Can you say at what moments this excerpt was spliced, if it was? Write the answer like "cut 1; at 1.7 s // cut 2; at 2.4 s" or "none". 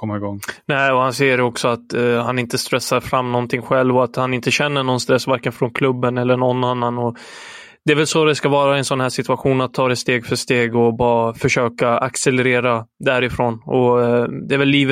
none